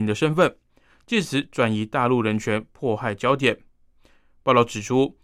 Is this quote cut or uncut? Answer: cut